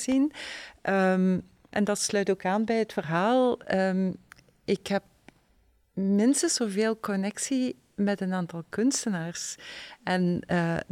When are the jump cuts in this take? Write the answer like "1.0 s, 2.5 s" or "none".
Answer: 1.7 s